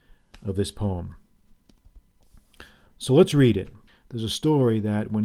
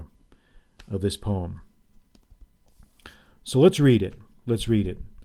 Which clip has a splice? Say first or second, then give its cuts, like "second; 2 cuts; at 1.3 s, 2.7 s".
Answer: first; 1 cut; at 3.9 s